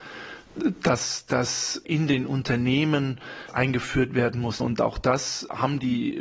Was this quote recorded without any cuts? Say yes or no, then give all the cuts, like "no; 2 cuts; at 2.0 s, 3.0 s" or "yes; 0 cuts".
no; 1 cut; at 4.6 s